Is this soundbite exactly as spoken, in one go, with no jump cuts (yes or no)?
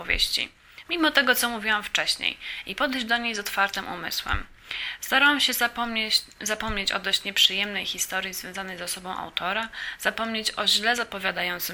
yes